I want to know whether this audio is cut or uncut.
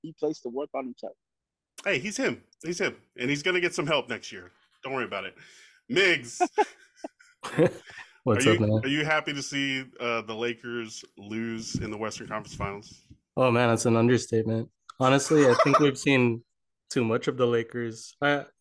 cut